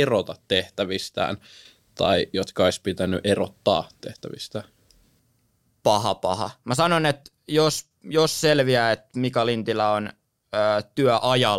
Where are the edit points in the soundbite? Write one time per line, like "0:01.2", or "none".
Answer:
none